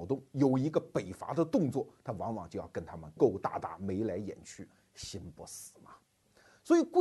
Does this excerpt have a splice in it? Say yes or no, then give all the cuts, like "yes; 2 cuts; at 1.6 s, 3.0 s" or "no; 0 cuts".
yes; 1 cut; at 3.2 s